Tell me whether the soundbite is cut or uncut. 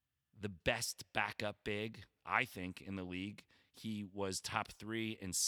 uncut